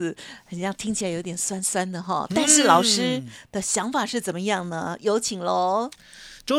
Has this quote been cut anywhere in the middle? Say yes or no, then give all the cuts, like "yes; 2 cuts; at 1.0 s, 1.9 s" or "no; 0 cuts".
no; 0 cuts